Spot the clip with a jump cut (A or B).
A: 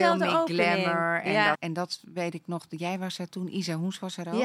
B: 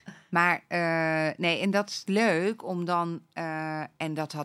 A